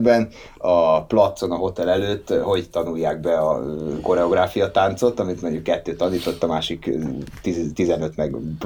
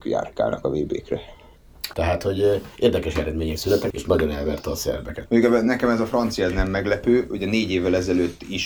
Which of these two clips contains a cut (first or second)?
second